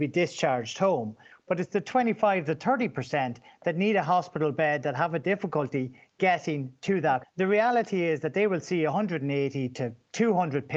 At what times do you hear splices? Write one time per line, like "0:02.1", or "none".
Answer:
0:07.2